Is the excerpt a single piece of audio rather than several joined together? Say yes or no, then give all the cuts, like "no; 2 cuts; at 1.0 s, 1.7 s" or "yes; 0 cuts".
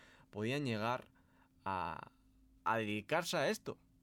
no; 1 cut; at 2.6 s